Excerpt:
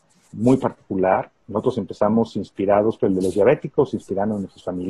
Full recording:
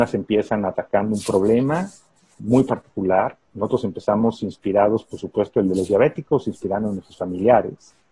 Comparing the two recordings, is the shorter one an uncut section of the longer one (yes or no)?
no